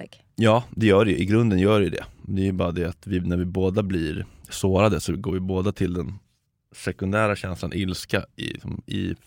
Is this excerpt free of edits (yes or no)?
yes